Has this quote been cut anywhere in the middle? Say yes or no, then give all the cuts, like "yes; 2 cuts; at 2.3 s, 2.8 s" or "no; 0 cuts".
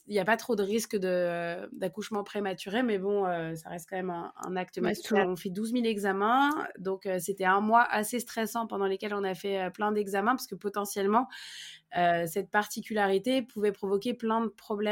yes; 1 cut; at 5.2 s